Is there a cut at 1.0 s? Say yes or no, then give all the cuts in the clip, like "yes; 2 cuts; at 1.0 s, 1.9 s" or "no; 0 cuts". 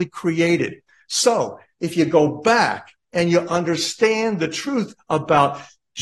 no; 0 cuts